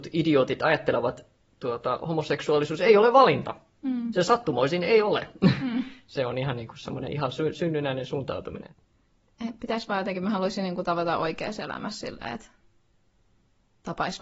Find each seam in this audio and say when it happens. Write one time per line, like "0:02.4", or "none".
none